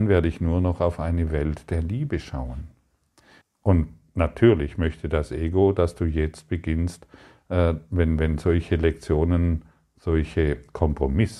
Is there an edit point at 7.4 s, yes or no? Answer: no